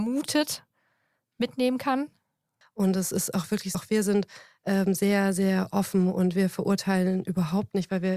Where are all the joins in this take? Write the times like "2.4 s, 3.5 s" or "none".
2.6 s, 3.7 s